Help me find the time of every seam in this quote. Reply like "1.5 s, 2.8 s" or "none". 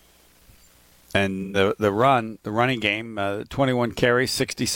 none